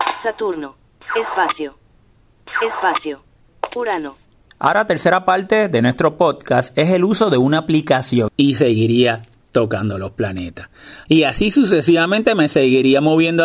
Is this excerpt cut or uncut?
cut